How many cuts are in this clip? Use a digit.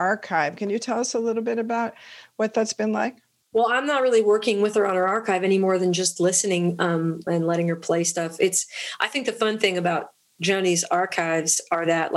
1